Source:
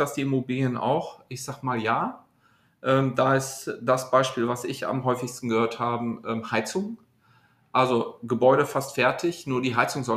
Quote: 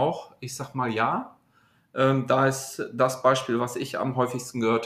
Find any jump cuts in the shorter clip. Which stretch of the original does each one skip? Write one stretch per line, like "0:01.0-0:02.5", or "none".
none